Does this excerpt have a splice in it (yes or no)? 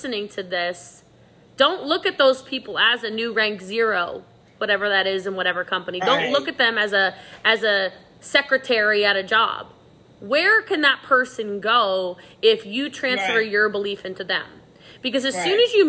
no